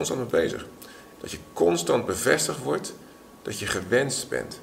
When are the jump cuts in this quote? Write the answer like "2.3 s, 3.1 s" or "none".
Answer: 1.2 s